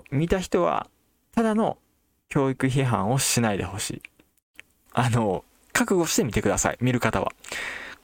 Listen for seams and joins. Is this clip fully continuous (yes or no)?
no